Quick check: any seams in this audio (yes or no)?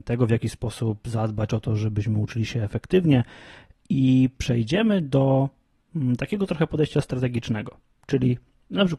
no